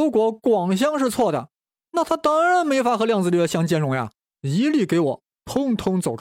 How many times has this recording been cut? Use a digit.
1